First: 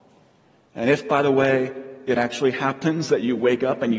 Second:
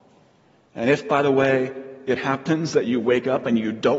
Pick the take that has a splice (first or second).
second